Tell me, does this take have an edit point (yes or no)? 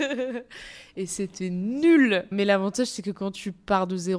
no